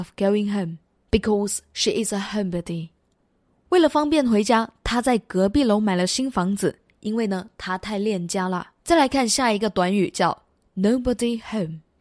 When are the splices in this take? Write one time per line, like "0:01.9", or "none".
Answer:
0:08.8